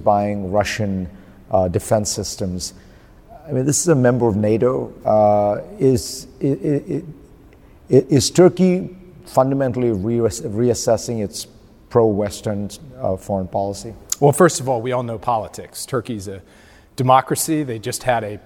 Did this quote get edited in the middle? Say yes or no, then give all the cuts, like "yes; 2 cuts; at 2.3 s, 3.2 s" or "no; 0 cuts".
no; 0 cuts